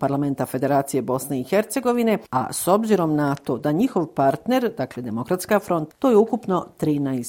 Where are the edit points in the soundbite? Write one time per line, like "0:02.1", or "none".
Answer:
0:05.9